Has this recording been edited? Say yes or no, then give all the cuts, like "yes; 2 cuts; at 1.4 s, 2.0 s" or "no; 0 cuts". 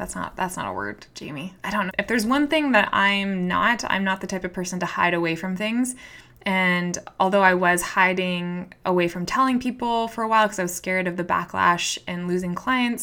yes; 1 cut; at 1.9 s